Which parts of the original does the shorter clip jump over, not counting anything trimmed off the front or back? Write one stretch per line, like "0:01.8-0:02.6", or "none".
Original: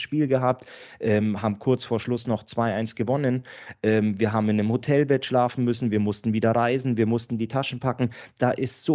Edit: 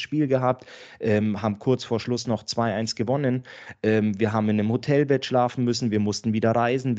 none